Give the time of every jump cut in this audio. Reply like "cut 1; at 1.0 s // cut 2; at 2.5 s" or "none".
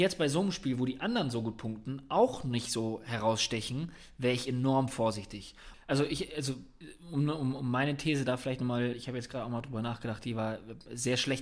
cut 1; at 5.7 s